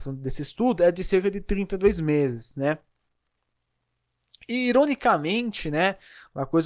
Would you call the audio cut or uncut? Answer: uncut